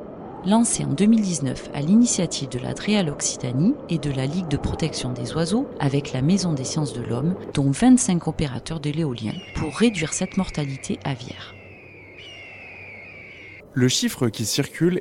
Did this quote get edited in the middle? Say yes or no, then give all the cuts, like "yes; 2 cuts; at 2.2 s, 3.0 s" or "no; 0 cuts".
yes; 2 cuts; at 7.5 s, 13.6 s